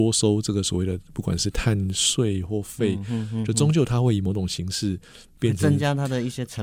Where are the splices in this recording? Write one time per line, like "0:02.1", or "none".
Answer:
none